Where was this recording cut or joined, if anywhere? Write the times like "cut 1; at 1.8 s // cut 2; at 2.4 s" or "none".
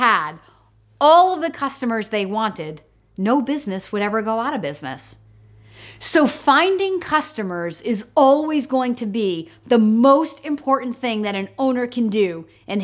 none